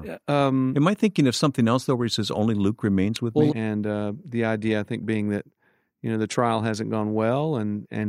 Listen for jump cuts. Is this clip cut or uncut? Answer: cut